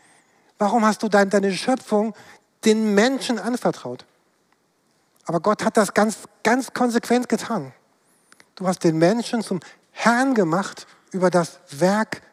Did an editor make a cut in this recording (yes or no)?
no